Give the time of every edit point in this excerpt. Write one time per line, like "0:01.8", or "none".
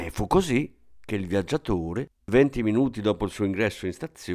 none